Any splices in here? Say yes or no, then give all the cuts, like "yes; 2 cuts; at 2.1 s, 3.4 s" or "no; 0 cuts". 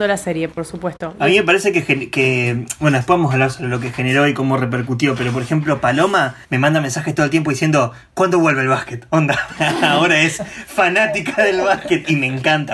yes; 1 cut; at 6.4 s